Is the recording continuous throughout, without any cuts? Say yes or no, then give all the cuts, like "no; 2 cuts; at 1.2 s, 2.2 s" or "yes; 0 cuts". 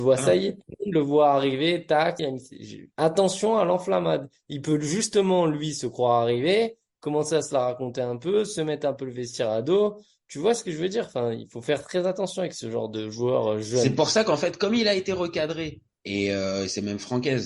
no; 1 cut; at 2.2 s